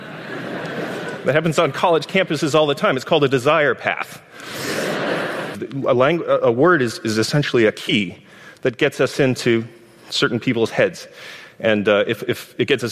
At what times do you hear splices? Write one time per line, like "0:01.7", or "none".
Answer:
0:05.5